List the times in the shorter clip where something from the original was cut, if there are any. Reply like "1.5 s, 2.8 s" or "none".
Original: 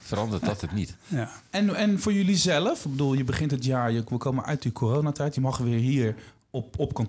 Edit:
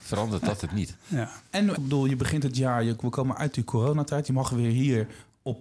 1.8 s